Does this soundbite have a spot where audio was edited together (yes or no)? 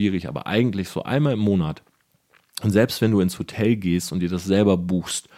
no